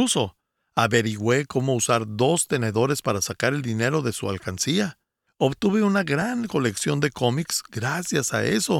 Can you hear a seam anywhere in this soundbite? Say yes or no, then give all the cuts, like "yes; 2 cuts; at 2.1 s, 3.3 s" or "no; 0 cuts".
no; 0 cuts